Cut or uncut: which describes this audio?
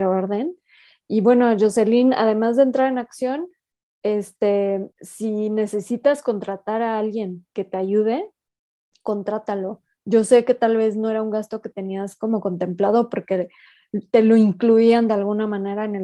cut